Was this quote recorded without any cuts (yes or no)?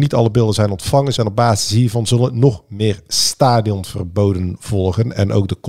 no